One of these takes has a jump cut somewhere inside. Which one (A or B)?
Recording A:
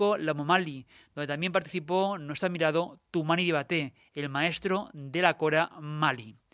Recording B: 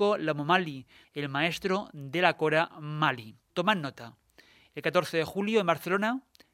B